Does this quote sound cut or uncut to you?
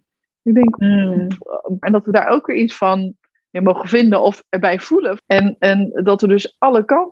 cut